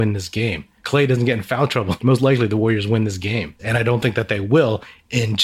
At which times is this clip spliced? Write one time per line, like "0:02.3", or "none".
0:03.6